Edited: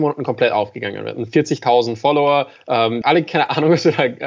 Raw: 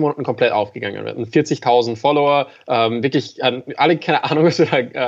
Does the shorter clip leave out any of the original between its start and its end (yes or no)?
yes